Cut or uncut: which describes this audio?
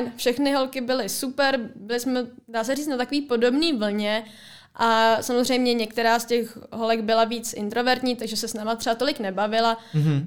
uncut